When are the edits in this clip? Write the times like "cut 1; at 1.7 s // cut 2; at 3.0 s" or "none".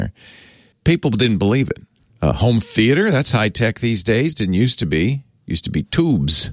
cut 1; at 2.1 s